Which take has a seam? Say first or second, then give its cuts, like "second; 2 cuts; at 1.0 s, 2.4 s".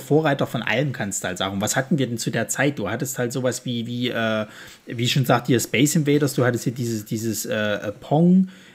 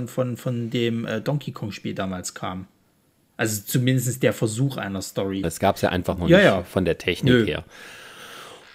second; 1 cut; at 5.4 s